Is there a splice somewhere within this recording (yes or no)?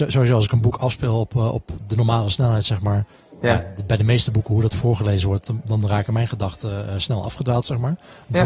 no